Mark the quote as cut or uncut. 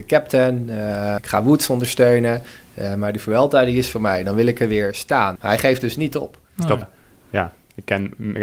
cut